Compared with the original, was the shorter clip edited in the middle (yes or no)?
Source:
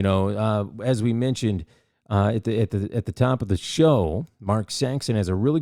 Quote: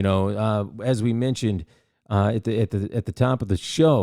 no